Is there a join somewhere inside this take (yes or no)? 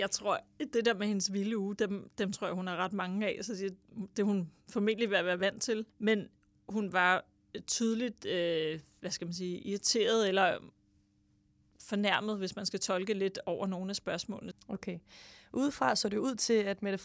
yes